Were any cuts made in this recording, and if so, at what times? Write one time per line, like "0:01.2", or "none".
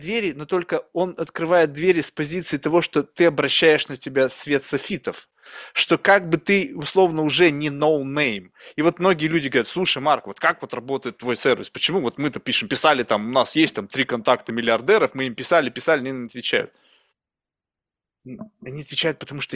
none